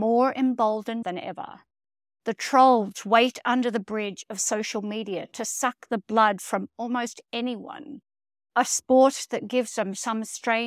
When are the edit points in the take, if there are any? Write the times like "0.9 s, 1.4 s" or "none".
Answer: 1.0 s